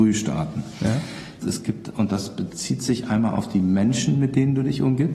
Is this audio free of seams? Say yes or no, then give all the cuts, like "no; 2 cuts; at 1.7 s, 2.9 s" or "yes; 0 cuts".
no; 1 cut; at 1.4 s